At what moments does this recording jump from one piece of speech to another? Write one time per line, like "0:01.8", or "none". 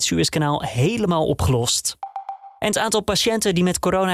0:02.6

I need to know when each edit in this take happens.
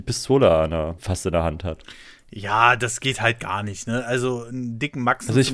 0:01.0

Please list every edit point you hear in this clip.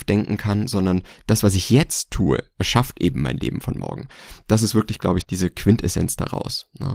0:05.2

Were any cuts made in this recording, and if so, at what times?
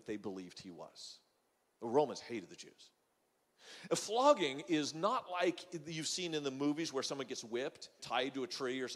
0:08.0

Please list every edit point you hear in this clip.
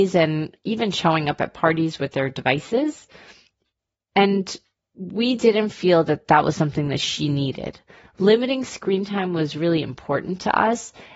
none

